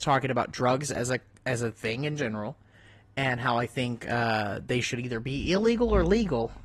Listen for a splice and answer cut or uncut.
uncut